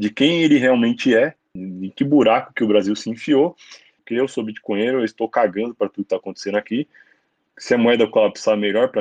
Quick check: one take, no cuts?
no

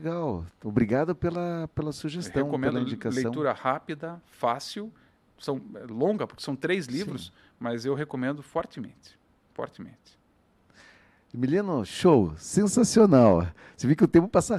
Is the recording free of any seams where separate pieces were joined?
yes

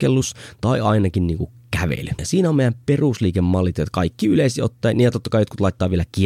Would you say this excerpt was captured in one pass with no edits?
no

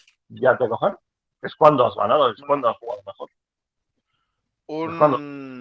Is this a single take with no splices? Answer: yes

